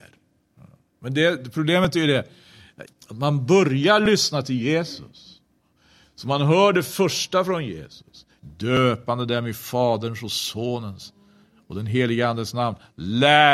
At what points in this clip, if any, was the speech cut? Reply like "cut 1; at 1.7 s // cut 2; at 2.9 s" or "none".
cut 1; at 2.9 s // cut 2; at 8.4 s